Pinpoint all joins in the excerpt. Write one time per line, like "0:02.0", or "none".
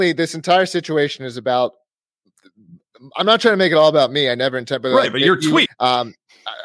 0:05.7